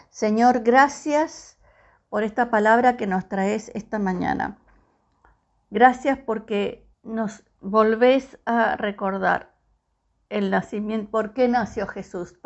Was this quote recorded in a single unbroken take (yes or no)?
no